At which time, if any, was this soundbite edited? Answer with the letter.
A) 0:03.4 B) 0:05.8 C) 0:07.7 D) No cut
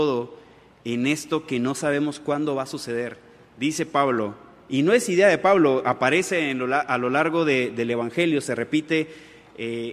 D